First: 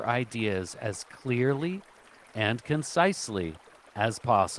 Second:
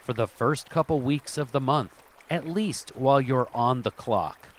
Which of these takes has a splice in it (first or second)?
second